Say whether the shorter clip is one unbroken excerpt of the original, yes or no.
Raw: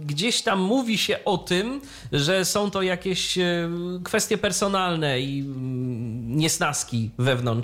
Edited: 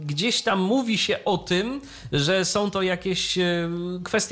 yes